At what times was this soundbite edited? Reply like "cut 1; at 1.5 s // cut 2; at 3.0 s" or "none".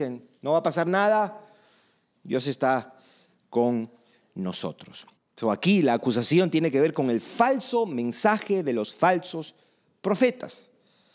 cut 1; at 5.2 s